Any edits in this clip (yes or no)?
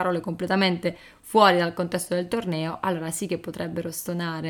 no